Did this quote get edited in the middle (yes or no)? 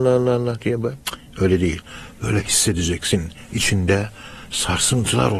no